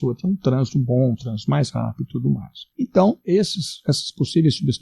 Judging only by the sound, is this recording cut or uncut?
cut